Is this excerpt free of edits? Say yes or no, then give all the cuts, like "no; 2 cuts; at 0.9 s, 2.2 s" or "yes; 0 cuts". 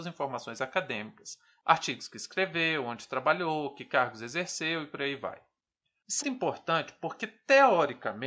no; 1 cut; at 6.2 s